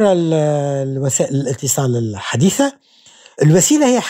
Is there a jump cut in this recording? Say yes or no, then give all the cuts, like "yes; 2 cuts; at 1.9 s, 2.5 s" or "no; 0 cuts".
no; 0 cuts